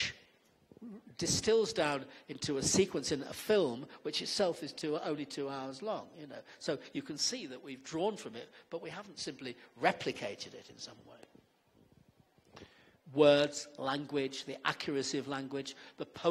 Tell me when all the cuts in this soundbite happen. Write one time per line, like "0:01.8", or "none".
0:12.9